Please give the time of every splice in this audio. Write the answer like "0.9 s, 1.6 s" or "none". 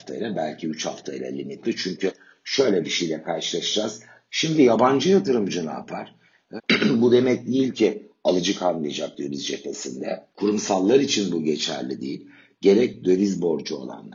4.3 s, 6.6 s, 10.3 s